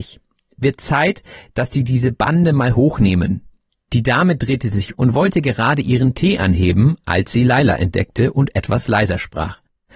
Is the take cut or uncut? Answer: cut